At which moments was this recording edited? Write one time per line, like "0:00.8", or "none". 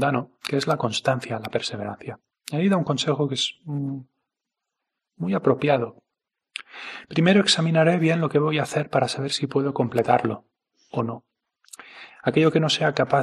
none